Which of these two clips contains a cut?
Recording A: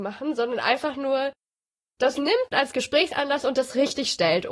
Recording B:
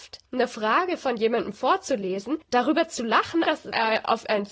B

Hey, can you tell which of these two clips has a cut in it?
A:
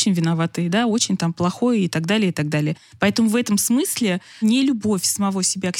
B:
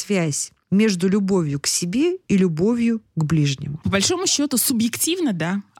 B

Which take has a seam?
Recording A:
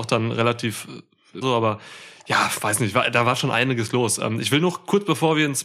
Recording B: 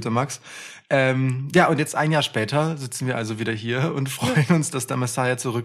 A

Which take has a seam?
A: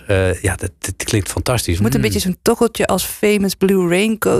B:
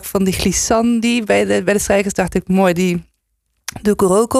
A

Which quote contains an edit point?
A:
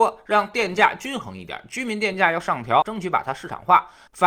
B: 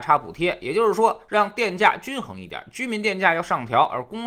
A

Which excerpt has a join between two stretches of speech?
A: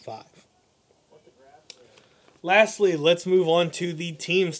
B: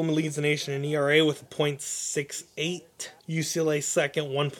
B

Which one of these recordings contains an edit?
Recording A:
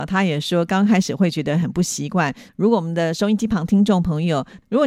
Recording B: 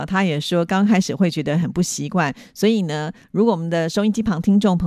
A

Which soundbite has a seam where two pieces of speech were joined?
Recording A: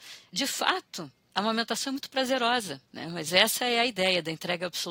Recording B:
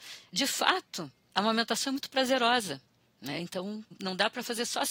A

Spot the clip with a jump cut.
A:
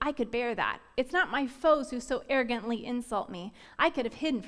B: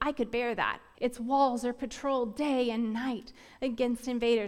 B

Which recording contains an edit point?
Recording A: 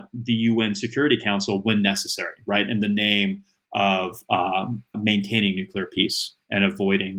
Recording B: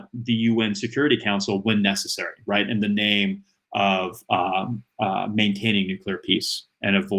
A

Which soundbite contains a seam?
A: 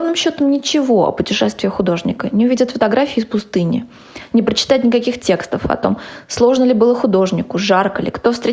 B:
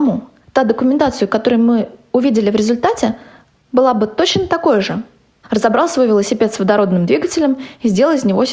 B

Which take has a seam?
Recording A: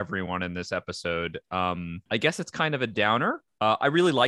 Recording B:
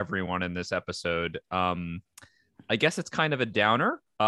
A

